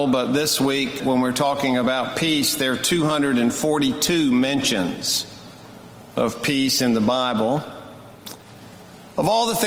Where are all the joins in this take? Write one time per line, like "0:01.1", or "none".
0:01.0

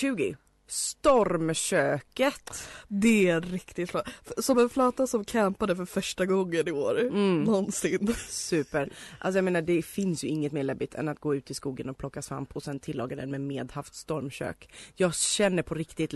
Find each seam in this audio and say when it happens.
0:04.5

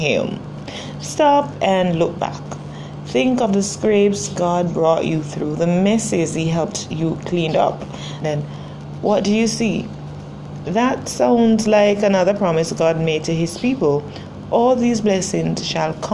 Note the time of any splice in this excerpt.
0:08.2
0:10.6

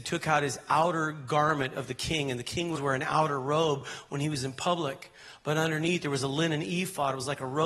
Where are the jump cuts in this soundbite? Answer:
0:02.7

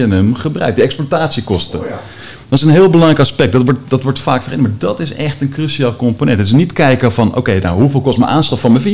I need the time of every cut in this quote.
none

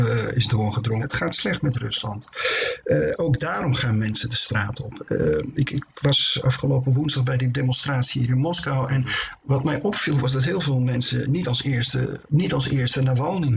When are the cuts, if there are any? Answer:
0:01.0
0:12.2

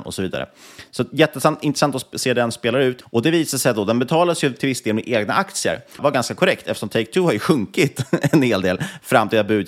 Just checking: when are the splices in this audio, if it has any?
0:03.0
0:06.0

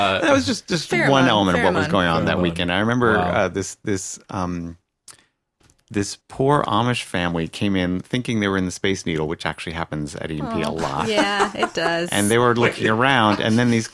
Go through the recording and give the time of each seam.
0:06.2

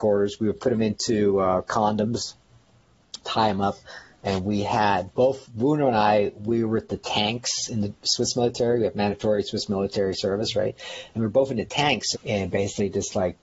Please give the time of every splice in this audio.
0:12.1

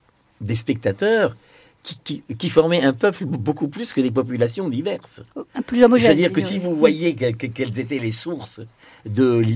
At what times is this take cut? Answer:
none

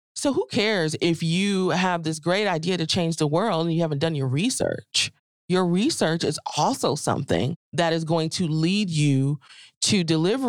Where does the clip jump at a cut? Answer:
none

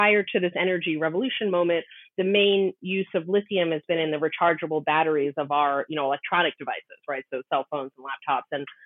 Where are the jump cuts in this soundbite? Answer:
none

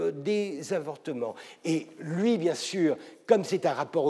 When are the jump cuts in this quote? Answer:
none

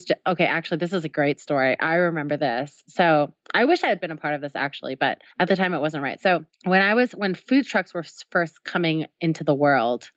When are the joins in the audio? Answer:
0:05.3
0:06.5

